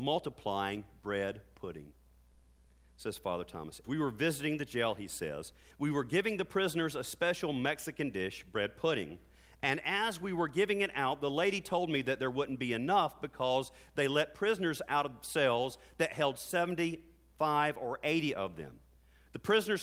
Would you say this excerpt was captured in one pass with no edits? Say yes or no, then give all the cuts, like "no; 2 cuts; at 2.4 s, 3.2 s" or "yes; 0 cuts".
no; 2 cuts; at 3.8 s, 5.7 s